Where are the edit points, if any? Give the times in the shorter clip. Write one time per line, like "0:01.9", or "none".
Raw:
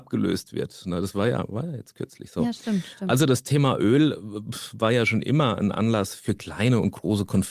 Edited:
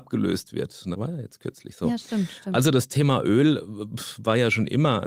0:00.9